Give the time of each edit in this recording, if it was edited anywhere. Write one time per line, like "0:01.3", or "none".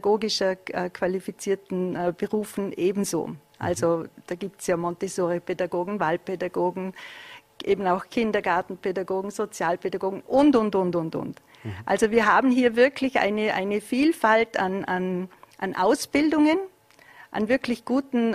none